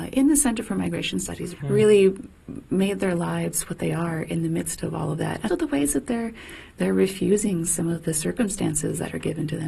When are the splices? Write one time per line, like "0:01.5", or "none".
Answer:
0:01.6
0:05.5